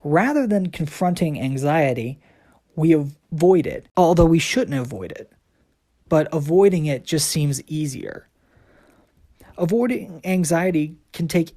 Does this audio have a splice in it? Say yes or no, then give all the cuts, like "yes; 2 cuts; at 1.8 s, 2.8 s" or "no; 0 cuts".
no; 0 cuts